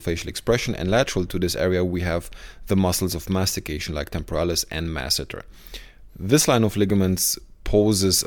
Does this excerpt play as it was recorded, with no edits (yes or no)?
no